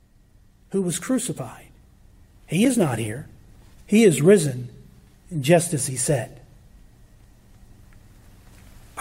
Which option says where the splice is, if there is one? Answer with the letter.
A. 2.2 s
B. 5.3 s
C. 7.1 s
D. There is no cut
D